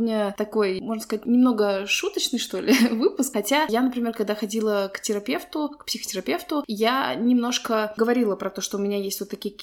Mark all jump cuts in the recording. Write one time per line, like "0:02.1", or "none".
none